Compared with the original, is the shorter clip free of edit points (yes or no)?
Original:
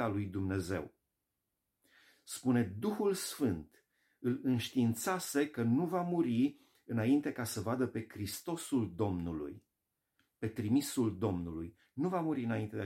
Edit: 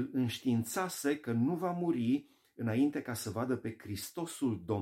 yes